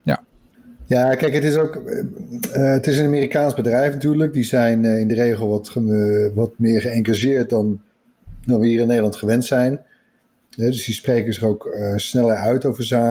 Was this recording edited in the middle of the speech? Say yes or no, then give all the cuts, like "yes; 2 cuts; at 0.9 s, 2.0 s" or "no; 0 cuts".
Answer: no; 0 cuts